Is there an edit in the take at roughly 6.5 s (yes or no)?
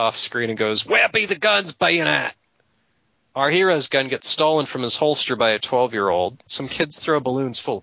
yes